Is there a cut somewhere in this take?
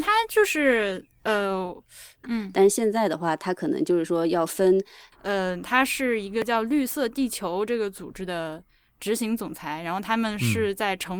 yes; 2 cuts; at 2.2 s, 5.1 s

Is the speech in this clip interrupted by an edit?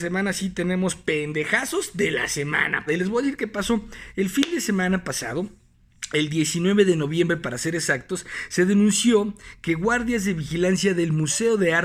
yes; 1 cut; at 2.9 s

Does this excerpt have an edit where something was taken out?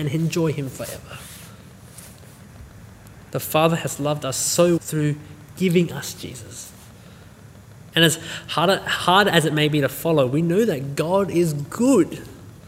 yes; 2 cuts; at 4.8 s, 7.9 s

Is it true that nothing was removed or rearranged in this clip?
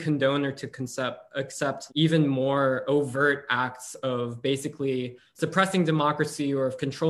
no; 1 cut; at 1.9 s

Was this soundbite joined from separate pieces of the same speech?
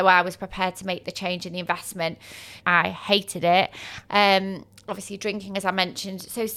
yes; 2 cuts; at 2.6 s, 4.1 s

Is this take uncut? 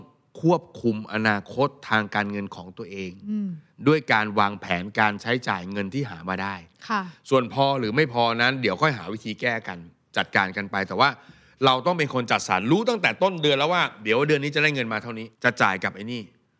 no; 1 cut; at 15.3 s

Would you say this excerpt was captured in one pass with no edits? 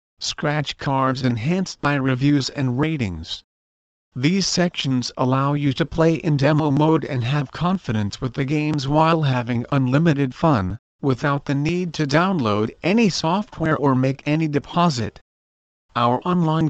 yes; 0 cuts

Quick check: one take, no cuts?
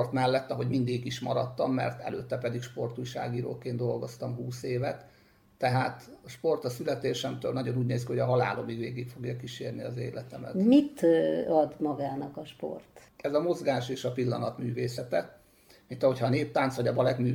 no; 1 cut; at 13.1 s

